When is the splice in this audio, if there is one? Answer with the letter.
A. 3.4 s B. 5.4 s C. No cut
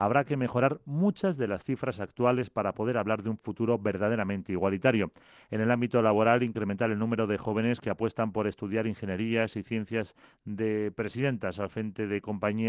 C